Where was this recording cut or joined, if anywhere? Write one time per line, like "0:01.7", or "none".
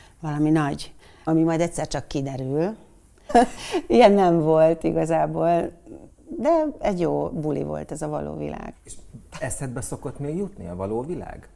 0:01.3
0:03.3
0:08.7